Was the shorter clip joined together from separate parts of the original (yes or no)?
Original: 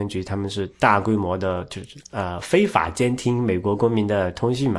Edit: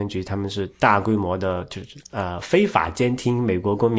no